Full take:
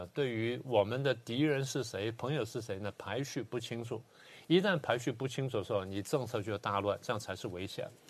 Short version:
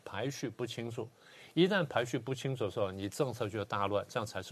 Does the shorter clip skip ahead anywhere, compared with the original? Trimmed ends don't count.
no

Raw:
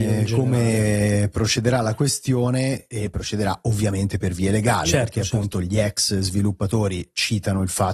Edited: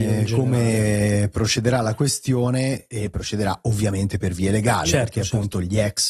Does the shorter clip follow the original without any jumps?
yes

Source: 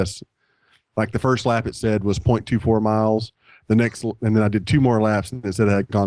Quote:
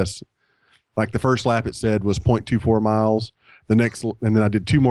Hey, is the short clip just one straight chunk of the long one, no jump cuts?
yes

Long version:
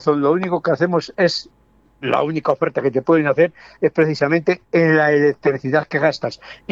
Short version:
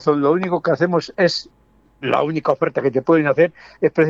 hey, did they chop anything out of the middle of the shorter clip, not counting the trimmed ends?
no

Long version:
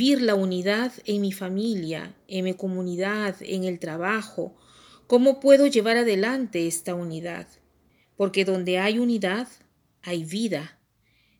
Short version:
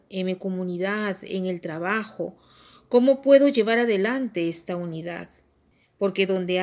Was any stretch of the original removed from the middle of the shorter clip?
no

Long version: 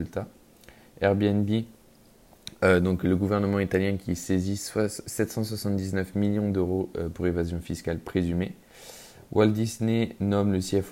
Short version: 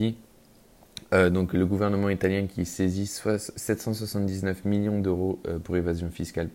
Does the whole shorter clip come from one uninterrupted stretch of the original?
yes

